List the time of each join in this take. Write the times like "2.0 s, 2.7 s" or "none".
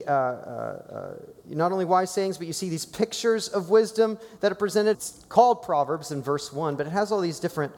4.9 s